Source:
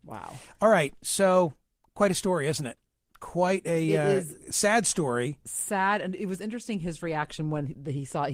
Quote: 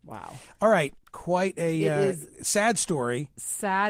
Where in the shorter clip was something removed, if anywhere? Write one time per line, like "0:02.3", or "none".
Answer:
0:01.0